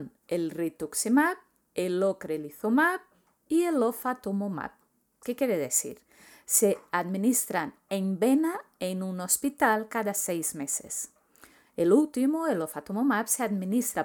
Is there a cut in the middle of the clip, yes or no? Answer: yes